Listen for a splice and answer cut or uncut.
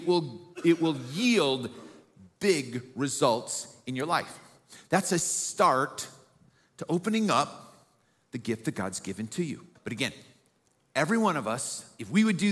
cut